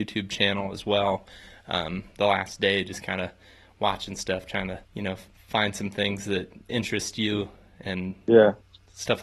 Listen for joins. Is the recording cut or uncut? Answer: cut